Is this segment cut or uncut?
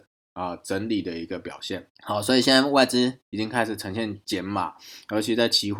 cut